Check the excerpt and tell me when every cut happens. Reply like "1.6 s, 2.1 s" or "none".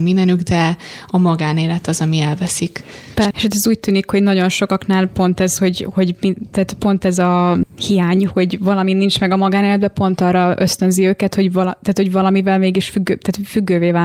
3.3 s